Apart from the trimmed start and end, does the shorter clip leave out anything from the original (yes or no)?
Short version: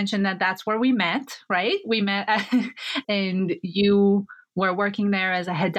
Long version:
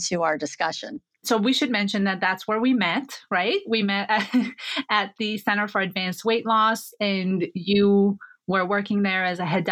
yes